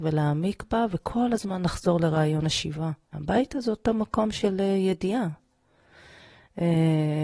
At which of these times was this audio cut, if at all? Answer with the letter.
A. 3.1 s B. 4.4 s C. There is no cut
A